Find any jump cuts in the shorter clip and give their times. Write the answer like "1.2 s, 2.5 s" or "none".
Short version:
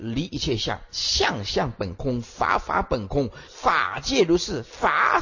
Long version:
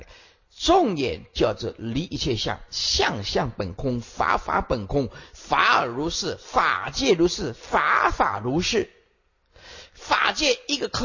3.5 s